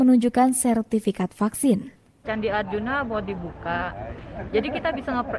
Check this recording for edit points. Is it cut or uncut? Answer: cut